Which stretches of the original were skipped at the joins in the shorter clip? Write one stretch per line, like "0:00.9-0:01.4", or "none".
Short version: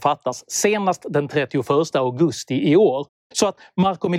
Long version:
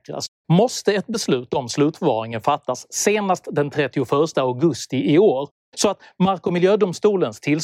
none

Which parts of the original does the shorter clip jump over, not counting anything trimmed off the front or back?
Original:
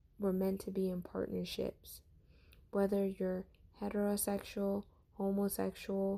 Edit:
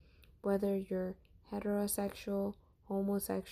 none

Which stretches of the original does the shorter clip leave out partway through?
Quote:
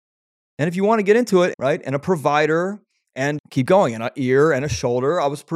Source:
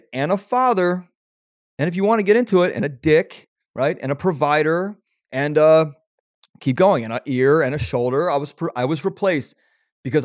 0:02.7-0:03.7
0:05.5-0:06.5

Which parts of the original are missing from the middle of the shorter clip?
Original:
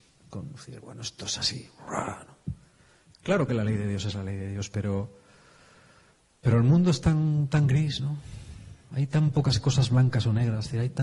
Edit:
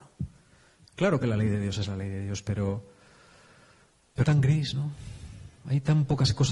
0:06.5-0:07.5

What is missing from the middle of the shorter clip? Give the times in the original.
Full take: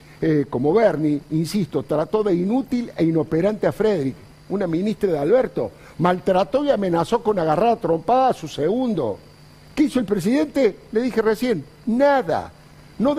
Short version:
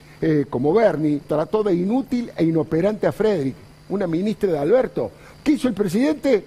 0:01.2-0:01.8
0:05.9-0:09.6

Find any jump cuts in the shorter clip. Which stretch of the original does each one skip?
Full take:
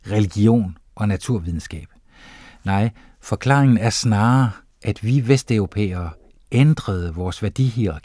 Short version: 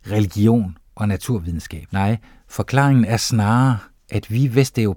0:01.9-0:02.6

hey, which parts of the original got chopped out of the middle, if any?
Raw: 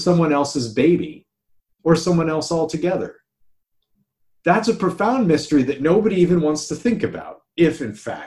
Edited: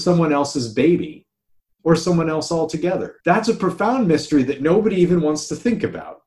0:03.2-0:04.4

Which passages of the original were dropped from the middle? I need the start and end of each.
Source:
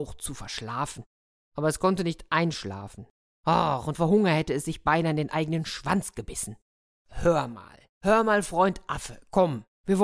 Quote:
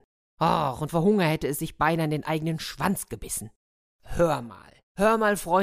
none

